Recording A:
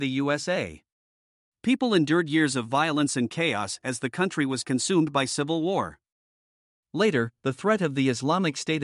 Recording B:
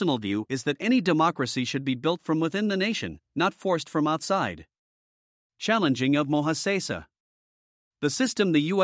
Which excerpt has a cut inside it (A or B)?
A